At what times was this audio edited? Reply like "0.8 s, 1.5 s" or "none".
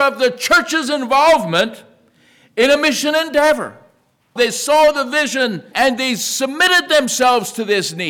4.4 s, 5.7 s

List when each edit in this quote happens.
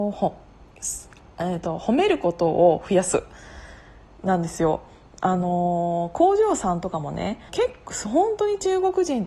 7.5 s

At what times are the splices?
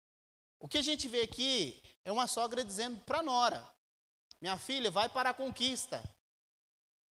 2.0 s

